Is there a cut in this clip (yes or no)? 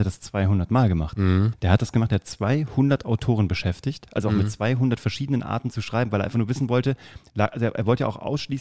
yes